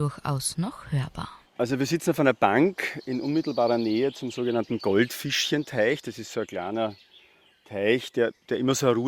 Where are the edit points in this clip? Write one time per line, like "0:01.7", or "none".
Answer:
0:01.4